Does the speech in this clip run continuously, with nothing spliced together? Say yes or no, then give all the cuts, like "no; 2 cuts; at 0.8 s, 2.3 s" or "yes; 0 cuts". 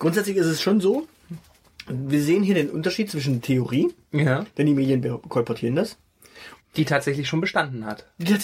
no; 1 cut; at 6.6 s